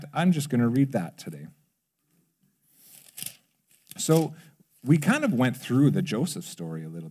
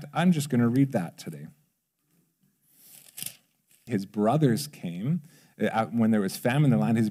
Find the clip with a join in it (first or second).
second